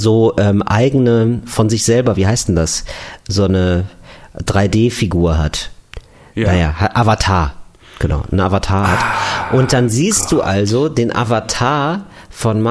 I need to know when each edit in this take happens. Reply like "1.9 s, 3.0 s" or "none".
none